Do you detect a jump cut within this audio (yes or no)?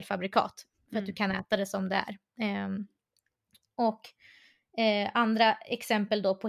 no